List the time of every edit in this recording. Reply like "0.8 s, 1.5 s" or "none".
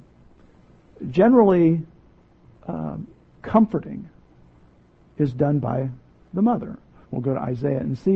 7.0 s